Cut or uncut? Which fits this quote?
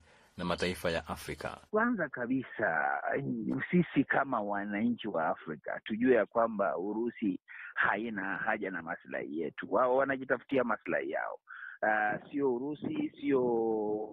cut